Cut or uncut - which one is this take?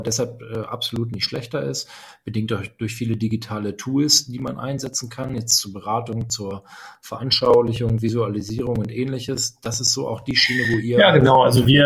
uncut